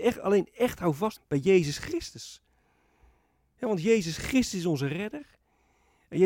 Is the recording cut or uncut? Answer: cut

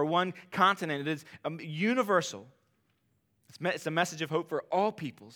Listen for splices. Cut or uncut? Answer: uncut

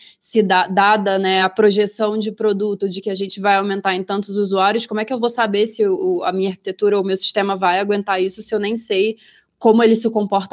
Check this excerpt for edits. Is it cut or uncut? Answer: uncut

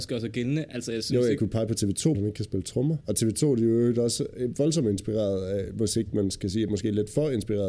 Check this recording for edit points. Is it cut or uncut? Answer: cut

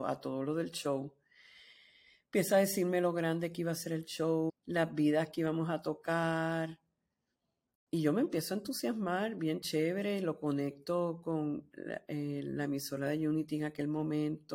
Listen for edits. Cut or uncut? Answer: cut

